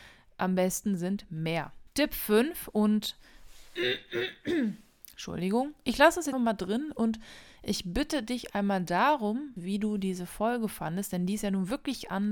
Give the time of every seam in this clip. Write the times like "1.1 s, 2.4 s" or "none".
1.9 s, 6.3 s, 9.6 s